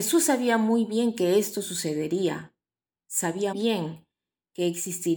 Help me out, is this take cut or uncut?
cut